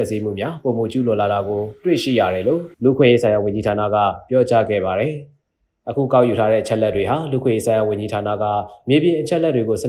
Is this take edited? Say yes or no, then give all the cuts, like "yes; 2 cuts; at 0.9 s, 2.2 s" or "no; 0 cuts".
yes; 1 cut; at 2.7 s